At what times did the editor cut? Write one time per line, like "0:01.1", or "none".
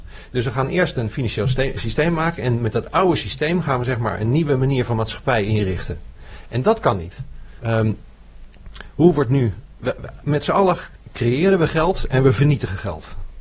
0:07.6